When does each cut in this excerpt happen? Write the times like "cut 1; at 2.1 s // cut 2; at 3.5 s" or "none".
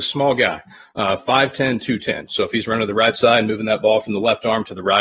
cut 1; at 2.3 s